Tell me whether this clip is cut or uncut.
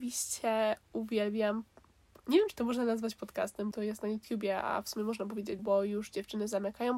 cut